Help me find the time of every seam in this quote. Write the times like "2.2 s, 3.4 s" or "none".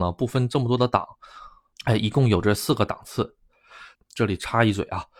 1.7 s, 4.0 s